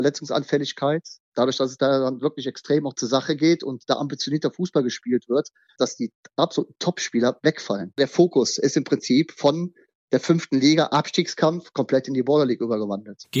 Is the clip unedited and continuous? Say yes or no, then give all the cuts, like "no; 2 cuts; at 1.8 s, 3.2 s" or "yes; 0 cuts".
no; 1 cut; at 5.8 s